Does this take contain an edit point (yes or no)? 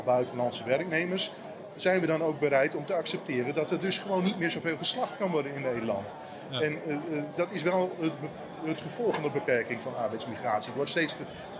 no